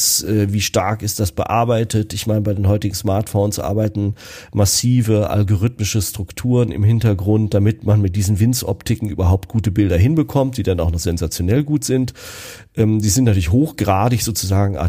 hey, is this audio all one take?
yes; 0 cuts

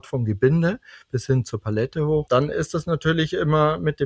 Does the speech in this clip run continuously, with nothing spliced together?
yes; 0 cuts

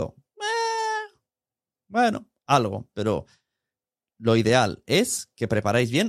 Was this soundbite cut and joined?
no; 0 cuts

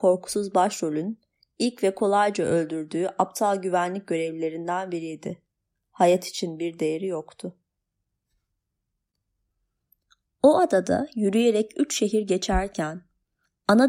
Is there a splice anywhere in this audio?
no; 0 cuts

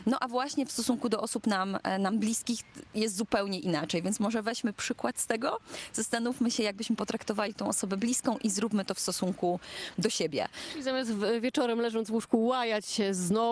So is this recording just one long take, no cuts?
yes; 0 cuts

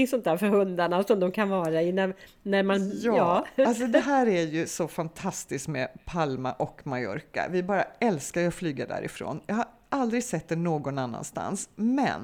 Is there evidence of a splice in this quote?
no; 0 cuts

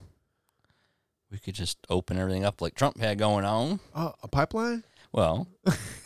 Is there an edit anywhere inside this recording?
no; 0 cuts

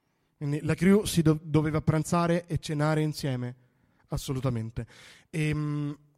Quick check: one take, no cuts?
yes; 0 cuts

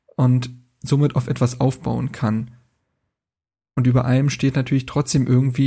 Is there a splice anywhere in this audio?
no; 0 cuts

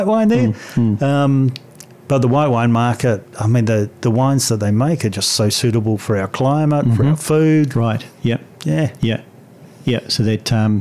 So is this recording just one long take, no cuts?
yes; 0 cuts

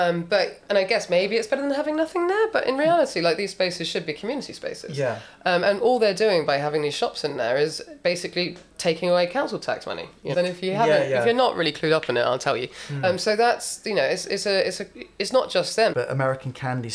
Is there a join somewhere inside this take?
yes; 3 cuts; at 10.3 s, 13.0 s, 15.9 s

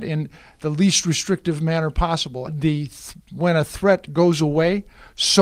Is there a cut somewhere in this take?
yes; 1 cut; at 2.5 s

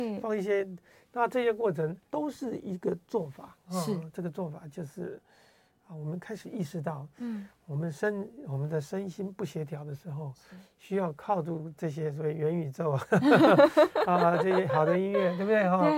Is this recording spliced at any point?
yes; 1 cut; at 2.0 s

